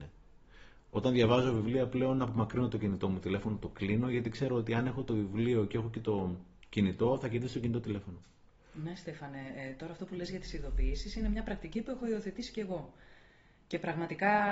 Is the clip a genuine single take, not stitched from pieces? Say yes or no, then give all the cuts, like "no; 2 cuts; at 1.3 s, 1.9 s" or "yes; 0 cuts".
yes; 0 cuts